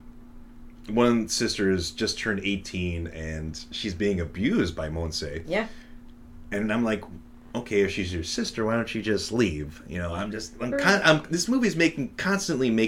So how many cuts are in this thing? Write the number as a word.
zero